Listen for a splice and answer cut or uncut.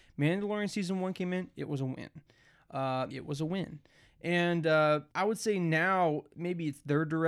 cut